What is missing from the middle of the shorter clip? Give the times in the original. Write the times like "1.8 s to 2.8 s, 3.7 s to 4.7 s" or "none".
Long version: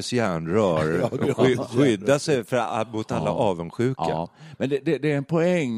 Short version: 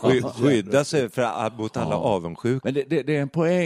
4.0 s to 4.6 s